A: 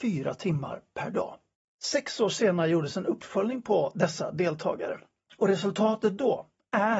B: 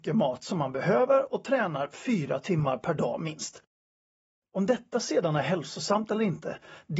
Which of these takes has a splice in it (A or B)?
A